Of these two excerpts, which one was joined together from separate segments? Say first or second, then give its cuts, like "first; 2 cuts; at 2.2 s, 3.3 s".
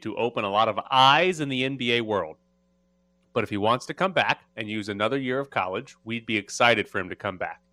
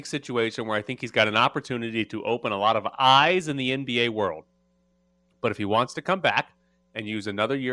first; 1 cut; at 4.5 s